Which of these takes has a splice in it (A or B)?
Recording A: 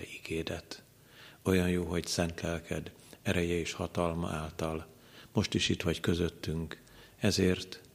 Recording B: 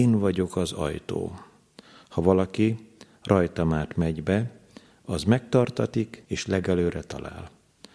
B